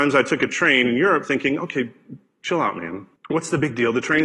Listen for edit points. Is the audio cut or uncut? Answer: cut